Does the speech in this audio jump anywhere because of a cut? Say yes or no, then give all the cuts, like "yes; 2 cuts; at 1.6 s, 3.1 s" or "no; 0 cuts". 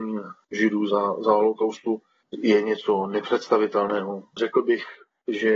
yes; 1 cut; at 4.4 s